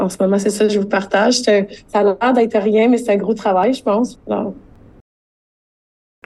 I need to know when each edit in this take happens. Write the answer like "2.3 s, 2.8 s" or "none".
4.2 s